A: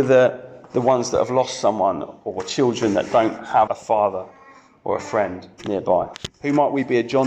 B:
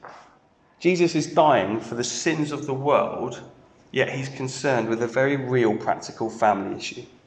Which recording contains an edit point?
A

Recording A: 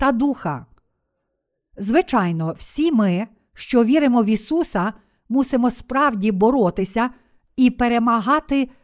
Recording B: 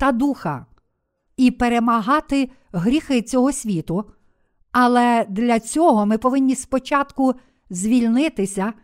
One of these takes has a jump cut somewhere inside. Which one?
B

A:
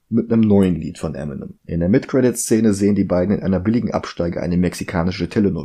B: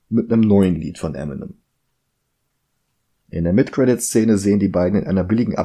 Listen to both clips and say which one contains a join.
A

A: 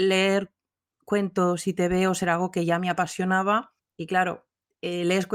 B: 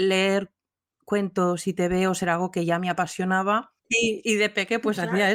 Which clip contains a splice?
B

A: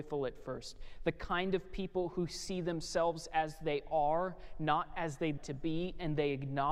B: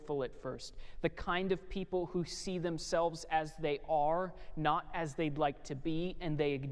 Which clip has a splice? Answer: A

